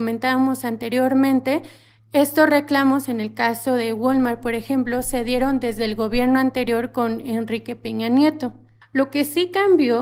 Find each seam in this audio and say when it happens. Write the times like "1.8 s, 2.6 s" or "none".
none